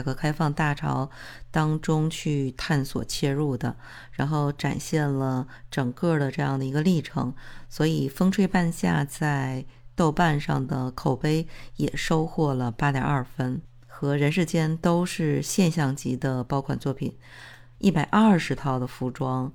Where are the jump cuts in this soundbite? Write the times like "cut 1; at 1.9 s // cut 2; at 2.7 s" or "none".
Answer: cut 1; at 17.8 s